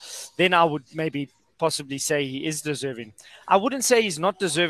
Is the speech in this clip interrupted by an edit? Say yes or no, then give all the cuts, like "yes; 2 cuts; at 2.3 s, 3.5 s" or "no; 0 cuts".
no; 0 cuts